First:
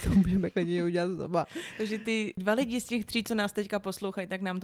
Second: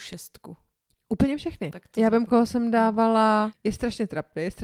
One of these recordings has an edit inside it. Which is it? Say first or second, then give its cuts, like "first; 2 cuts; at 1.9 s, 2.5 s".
second; 2 cuts; at 1.7 s, 3.5 s